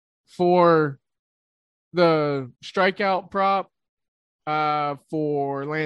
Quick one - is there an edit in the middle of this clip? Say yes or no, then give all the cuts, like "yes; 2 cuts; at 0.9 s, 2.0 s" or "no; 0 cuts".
yes; 1 cut; at 2.5 s